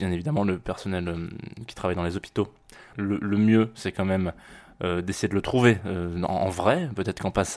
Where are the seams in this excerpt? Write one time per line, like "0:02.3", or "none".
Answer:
0:02.9